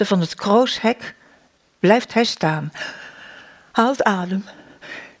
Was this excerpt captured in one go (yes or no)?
yes